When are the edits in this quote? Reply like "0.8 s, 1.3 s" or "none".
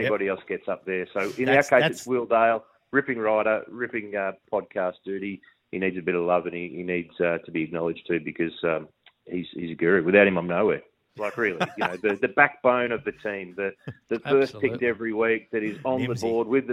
11.1 s

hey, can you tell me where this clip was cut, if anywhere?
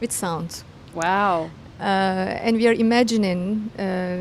none

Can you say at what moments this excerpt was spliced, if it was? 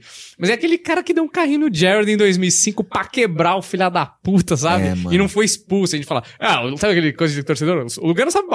none

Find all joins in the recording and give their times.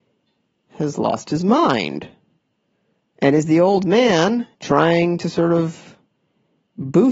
3.0 s, 4.5 s

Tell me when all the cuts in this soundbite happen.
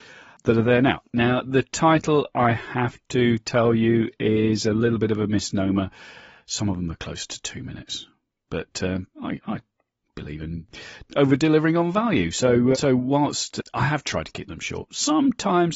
9.1 s, 12.7 s

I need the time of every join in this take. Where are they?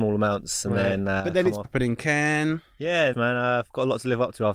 1.6 s, 3.1 s

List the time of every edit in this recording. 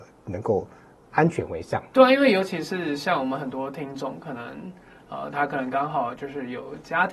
1.9 s

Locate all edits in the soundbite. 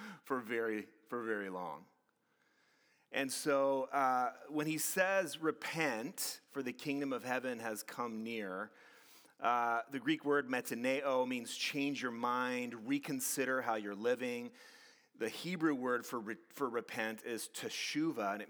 none

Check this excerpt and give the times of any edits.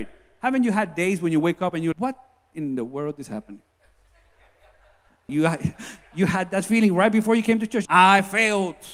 1.9 s, 5.3 s, 7.9 s

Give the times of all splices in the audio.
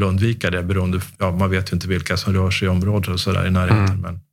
1.2 s

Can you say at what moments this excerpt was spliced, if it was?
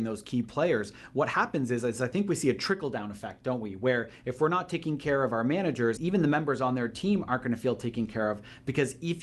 6.0 s

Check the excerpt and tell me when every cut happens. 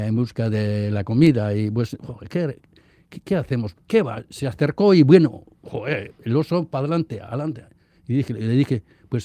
3.7 s

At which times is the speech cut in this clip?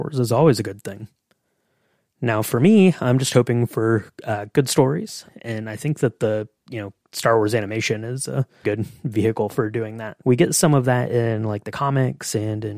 5.2 s, 8.6 s, 10.2 s

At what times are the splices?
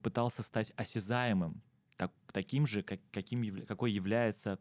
none

